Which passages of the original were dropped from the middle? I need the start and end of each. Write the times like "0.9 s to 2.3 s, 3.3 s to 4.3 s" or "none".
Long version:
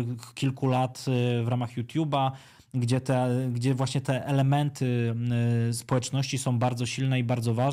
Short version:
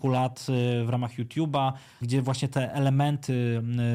2.6 s to 3.5 s